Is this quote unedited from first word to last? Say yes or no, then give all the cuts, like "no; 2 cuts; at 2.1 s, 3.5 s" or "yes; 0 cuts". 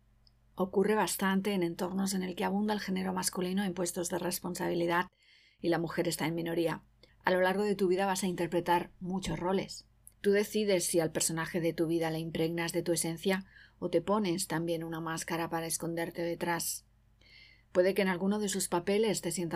no; 2 cuts; at 7.1 s, 10.1 s